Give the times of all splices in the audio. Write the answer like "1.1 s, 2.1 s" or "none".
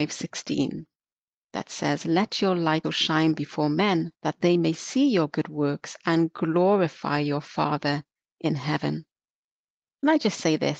2.8 s, 4.1 s